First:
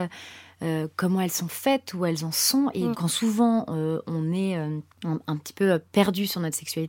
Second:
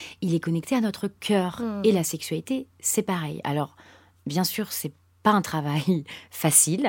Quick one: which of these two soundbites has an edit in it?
first; 2 cuts; at 2.9 s, 4.9 s

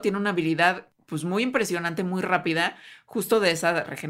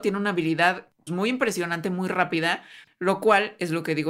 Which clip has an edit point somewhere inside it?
second; 2 cuts; at 1.1 s, 2.8 s

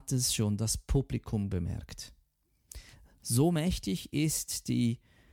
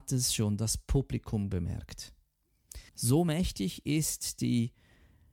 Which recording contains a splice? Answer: second; 1 cut; at 2.9 s

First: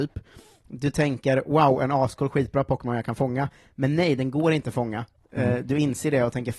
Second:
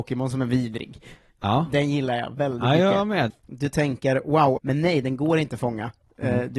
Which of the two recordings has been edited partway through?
second; 2 cuts; at 3.3 s, 4.6 s

